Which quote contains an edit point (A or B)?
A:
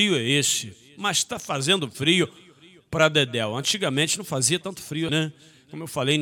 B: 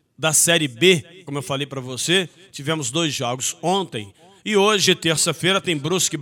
A